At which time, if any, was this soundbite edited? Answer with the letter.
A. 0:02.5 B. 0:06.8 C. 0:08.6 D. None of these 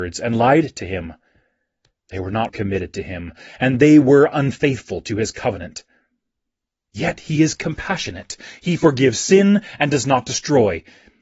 A